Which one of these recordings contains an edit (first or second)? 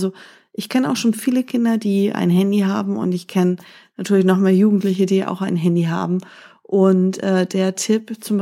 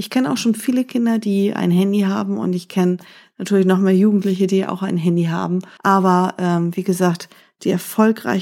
second